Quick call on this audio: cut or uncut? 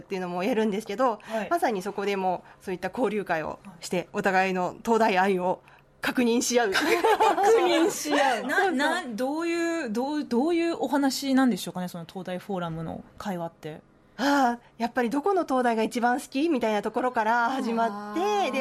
uncut